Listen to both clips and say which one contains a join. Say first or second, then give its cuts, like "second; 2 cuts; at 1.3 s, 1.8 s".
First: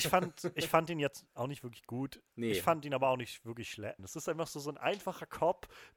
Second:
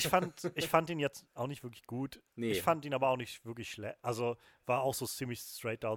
first; 1 cut; at 4.0 s